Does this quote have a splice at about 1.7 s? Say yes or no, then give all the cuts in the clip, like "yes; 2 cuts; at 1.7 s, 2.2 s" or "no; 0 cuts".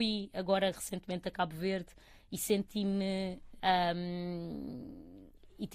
no; 1 cut; at 3.6 s